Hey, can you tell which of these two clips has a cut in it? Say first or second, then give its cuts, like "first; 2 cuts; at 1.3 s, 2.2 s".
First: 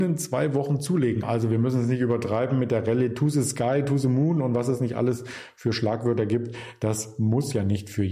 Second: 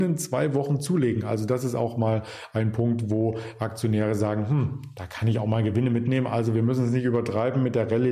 first; 1 cut; at 1.2 s